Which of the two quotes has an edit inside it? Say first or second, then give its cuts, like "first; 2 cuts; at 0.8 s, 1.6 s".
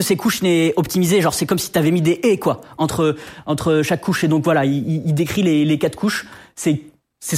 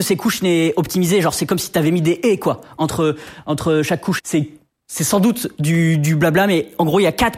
second; 1 cut; at 4.2 s